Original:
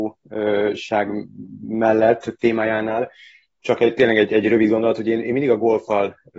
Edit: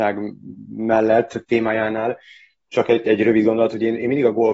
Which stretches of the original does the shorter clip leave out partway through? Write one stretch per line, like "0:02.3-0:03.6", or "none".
0:04.0-0:04.3